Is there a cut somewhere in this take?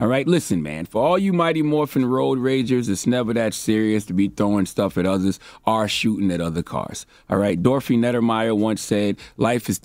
no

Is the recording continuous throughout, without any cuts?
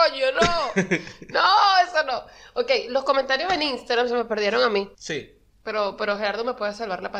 no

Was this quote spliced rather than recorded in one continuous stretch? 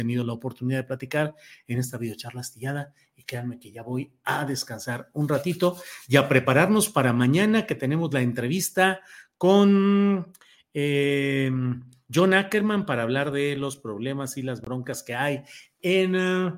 no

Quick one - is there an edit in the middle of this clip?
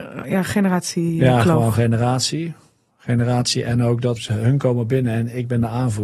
yes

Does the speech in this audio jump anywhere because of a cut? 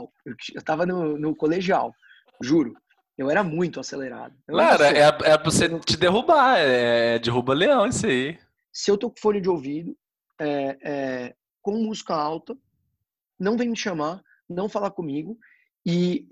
yes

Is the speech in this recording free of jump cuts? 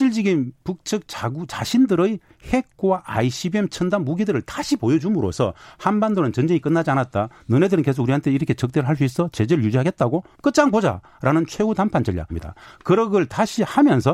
no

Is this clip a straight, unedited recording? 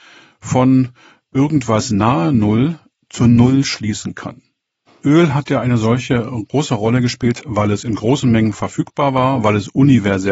no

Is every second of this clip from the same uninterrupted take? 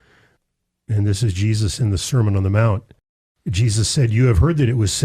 yes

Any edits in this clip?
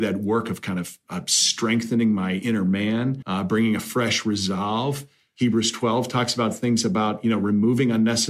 yes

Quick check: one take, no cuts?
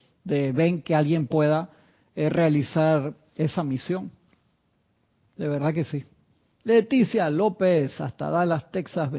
no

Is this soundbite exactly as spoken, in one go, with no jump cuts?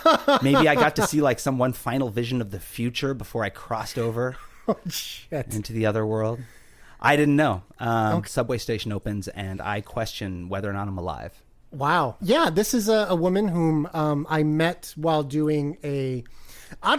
no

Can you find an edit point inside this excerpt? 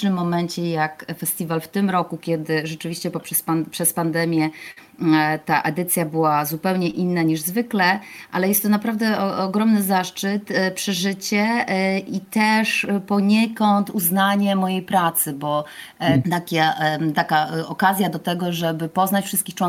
yes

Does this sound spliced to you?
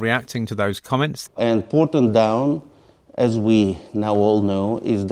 yes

